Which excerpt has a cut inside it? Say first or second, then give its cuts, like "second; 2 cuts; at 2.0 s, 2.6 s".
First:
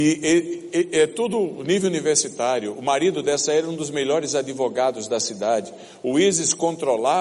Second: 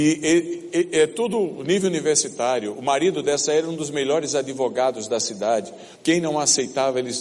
second; 1 cut; at 6.0 s